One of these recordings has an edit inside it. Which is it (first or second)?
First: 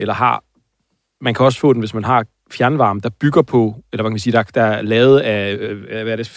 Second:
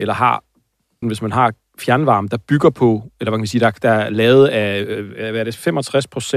second